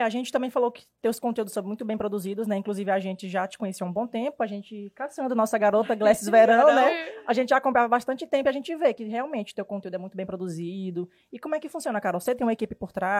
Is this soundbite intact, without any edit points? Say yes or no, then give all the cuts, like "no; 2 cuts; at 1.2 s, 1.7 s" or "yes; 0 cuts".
yes; 0 cuts